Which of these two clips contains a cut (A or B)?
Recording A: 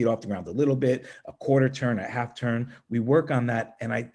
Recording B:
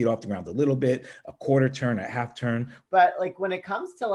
B